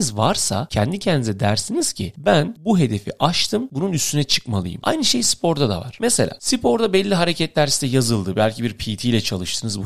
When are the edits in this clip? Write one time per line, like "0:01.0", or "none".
0:04.8